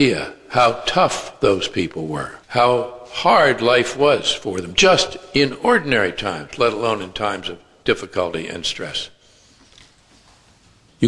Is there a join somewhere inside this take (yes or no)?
yes